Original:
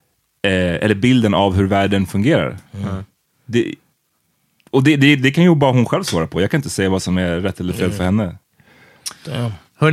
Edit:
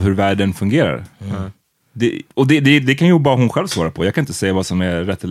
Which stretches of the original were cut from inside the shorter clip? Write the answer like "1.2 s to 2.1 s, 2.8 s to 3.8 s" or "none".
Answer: 3.8 s to 4.7 s